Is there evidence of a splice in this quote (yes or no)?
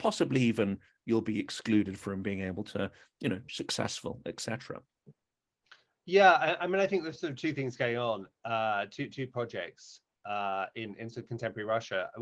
yes